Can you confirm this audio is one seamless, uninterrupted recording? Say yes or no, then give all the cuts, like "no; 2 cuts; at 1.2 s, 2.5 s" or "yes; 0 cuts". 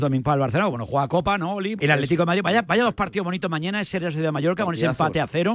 no; 1 cut; at 1.8 s